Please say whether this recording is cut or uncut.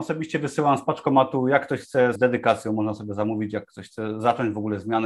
cut